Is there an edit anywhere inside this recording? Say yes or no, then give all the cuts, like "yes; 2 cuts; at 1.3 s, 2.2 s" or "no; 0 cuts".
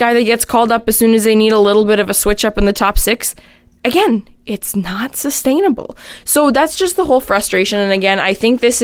no; 0 cuts